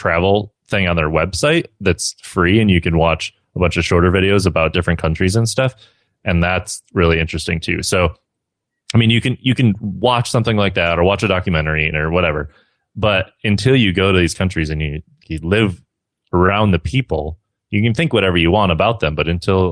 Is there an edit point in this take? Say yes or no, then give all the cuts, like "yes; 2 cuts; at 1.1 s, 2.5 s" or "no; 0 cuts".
yes; 2 cuts; at 11.9 s, 15.2 s